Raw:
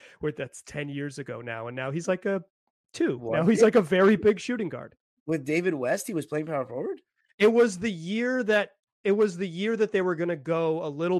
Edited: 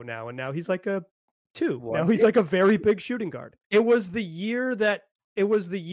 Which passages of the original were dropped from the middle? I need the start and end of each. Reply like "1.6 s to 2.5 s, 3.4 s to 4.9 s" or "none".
5.0 s to 7.3 s